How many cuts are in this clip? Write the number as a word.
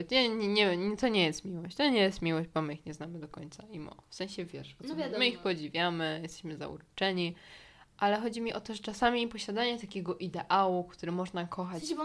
zero